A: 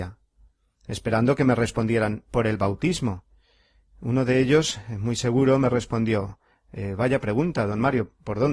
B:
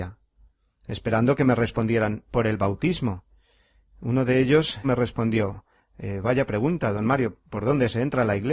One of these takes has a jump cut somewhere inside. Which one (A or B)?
B